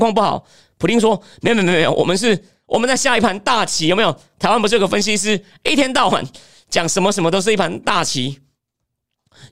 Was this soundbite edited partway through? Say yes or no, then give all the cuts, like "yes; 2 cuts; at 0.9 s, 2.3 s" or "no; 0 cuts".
no; 0 cuts